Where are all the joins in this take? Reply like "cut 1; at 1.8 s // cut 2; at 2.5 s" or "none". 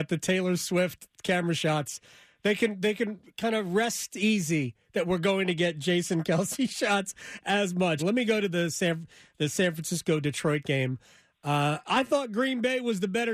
cut 1; at 8.0 s

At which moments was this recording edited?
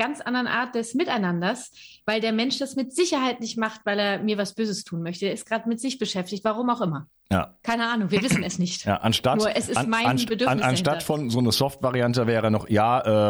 none

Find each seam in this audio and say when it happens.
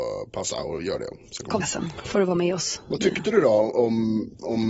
cut 1; at 1.6 s

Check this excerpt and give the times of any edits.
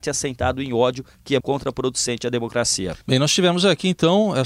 cut 1; at 1.4 s // cut 2; at 3.0 s

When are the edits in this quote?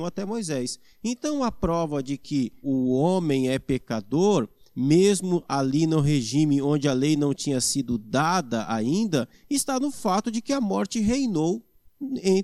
cut 1; at 2.6 s

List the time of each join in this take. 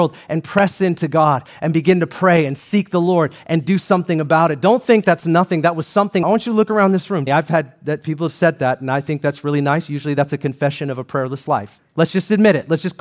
cut 1; at 6.2 s // cut 2; at 7.3 s // cut 3; at 11.8 s

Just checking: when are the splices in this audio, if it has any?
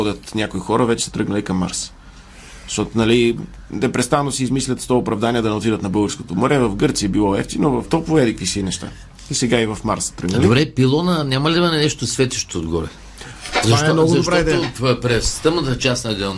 cut 1; at 7.8 s

